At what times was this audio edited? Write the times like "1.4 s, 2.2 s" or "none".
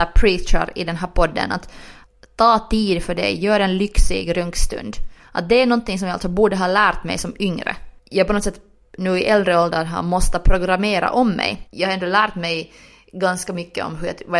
none